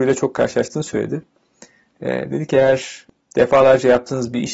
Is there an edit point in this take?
no; 0 cuts

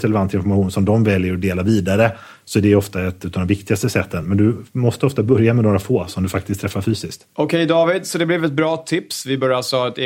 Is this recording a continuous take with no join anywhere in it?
yes; 0 cuts

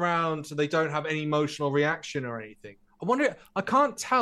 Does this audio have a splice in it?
yes; 1 cut; at 2.9 s

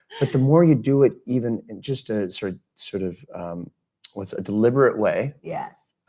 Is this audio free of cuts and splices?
yes; 0 cuts

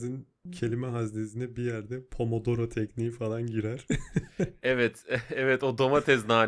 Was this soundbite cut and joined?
no; 0 cuts

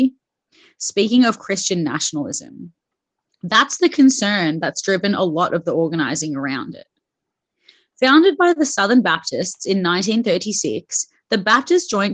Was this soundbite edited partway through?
no; 0 cuts

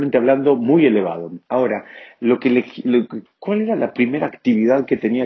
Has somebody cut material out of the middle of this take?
yes; 2 cuts; at 1.4 s, 3.3 s

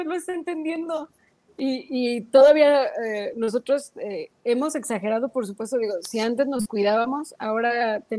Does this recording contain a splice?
no; 0 cuts

